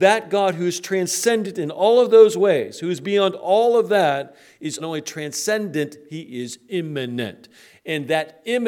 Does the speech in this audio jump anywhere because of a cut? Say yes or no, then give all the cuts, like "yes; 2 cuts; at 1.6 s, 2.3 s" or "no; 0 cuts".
yes; 1 cut; at 4.8 s